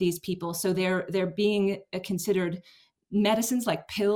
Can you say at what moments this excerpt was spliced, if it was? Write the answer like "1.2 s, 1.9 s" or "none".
none